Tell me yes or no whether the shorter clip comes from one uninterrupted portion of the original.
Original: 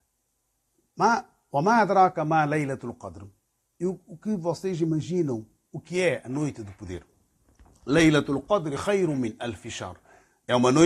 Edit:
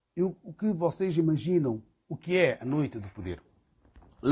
yes